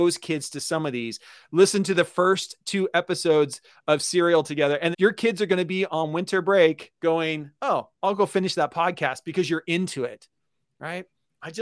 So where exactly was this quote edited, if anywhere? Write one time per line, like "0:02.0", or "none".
0:04.9
0:07.0